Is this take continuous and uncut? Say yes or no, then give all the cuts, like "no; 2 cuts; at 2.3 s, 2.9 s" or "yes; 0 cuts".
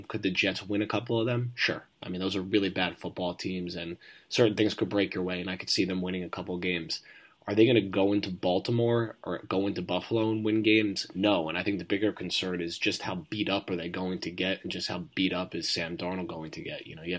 yes; 0 cuts